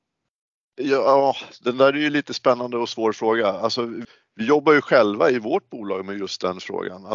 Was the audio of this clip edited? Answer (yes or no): no